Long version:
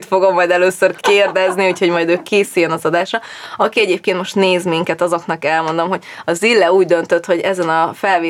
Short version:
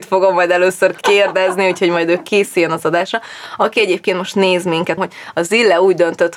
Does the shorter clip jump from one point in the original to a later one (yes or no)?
yes